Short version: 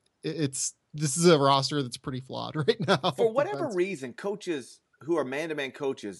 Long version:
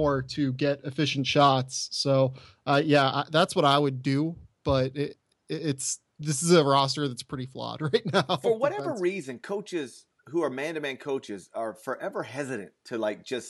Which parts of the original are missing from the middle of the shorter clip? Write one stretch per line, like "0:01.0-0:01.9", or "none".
none